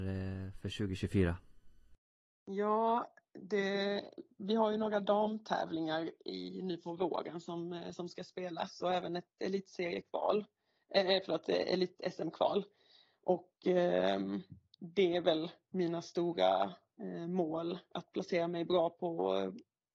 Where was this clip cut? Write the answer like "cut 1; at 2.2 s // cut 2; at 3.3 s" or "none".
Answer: none

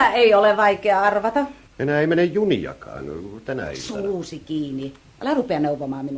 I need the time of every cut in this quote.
cut 1; at 1.7 s

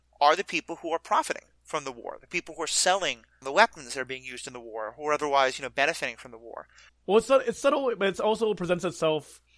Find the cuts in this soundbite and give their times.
cut 1; at 3.4 s // cut 2; at 6.9 s

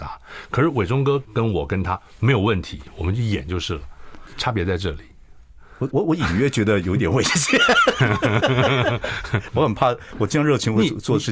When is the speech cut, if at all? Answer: cut 1; at 1.2 s // cut 2; at 5.9 s // cut 3; at 9.5 s

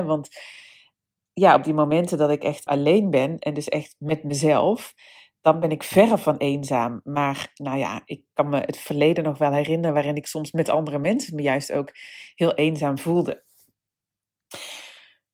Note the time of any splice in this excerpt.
cut 1; at 2.7 s

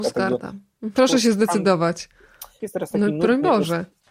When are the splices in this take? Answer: cut 1; at 1.0 s // cut 2; at 2.6 s

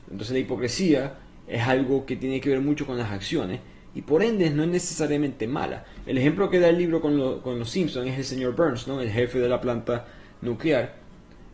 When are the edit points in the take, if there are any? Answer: none

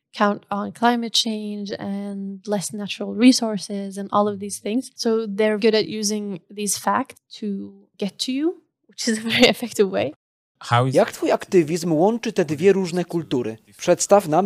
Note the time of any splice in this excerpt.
cut 1; at 5.6 s

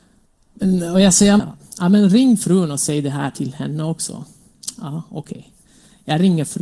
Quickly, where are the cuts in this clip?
cut 1; at 1.4 s

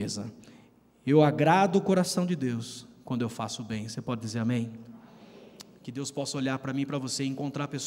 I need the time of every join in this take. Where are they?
none

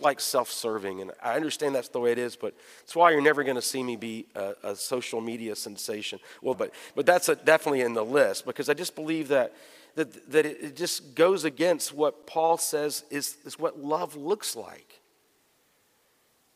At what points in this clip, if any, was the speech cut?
cut 1; at 1.1 s // cut 2; at 6.5 s

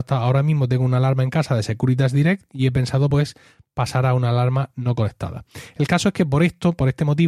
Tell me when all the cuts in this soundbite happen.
none

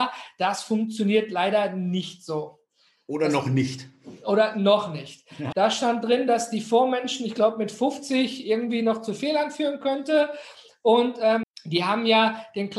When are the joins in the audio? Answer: cut 1; at 5.5 s // cut 2; at 11.4 s

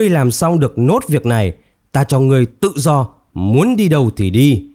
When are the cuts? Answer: none

